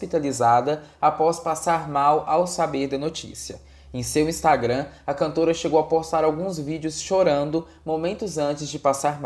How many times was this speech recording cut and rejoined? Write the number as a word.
zero